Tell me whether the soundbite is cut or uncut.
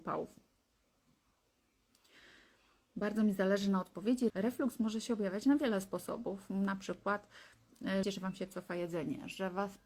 cut